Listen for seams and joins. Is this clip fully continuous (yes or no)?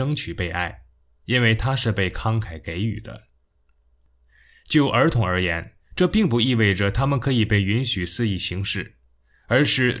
yes